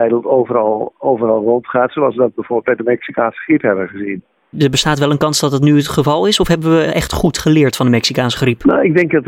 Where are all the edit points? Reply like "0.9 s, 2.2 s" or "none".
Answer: none